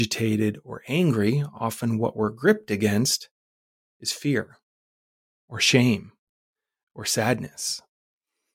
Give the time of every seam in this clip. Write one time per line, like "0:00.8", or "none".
none